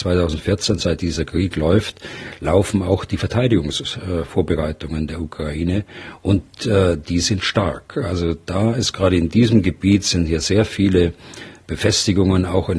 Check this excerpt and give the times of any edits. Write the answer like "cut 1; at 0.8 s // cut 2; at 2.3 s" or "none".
none